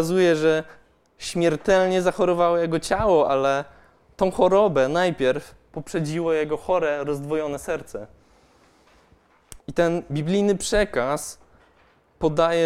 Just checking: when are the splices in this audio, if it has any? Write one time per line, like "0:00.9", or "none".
0:09.6